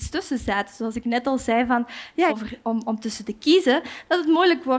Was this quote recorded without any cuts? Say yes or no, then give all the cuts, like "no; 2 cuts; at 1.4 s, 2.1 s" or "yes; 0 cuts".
no; 1 cut; at 2.3 s